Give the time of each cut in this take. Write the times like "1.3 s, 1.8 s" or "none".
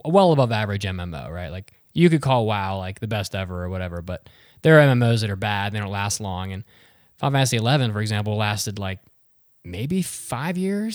none